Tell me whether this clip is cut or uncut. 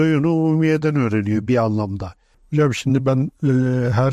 cut